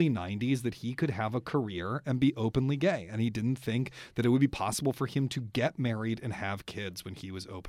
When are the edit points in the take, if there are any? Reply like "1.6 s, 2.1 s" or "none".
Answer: none

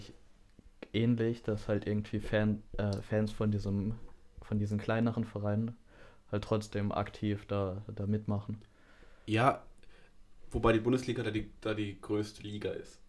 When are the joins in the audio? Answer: none

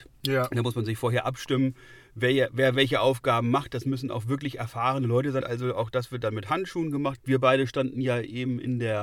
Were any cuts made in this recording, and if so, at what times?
5.4 s, 7.2 s

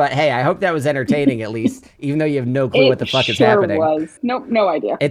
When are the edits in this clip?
4.2 s

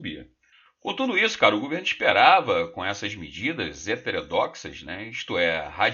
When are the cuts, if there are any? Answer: none

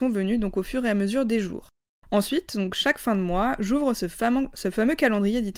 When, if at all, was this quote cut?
none

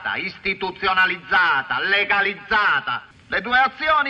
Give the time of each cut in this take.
3.1 s

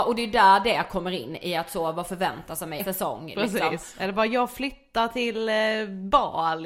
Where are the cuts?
2.8 s

